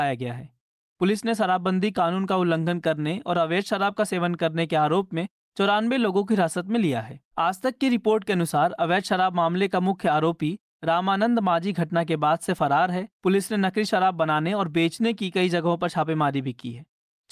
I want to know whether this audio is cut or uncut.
cut